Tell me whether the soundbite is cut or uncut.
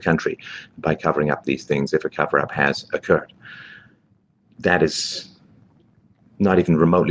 uncut